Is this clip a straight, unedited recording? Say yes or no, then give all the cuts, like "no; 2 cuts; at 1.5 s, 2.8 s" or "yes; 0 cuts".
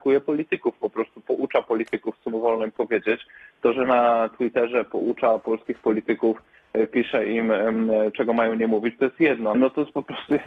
no; 1 cut; at 9.5 s